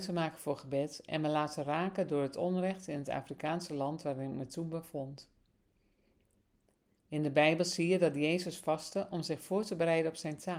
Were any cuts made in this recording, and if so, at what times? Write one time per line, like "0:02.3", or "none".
none